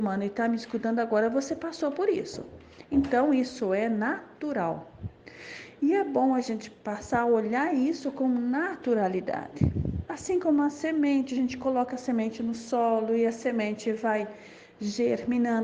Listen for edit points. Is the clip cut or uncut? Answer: uncut